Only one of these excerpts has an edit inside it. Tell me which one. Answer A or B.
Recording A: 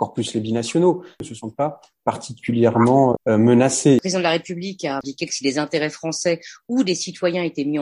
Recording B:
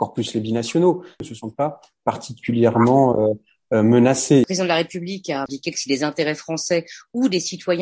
A